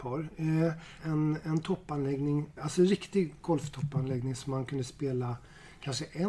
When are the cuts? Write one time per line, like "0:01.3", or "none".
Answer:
0:01.0
0:02.6